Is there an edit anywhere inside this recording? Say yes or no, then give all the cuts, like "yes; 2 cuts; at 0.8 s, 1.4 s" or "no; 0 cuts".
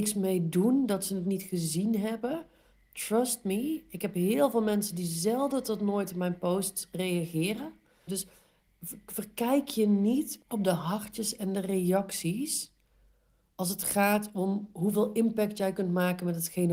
yes; 2 cuts; at 8.1 s, 10.4 s